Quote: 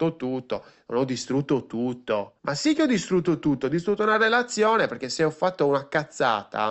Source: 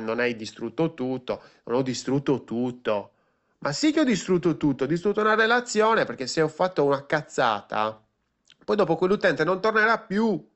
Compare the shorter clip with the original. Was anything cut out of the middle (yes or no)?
yes